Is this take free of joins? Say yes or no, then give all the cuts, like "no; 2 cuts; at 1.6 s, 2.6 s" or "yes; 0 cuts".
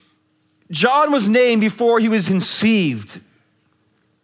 no; 1 cut; at 2.3 s